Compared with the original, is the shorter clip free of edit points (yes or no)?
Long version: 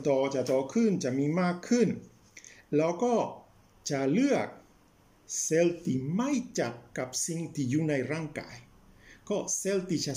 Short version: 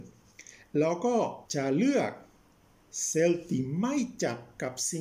no